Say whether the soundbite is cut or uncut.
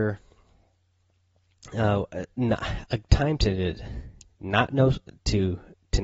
uncut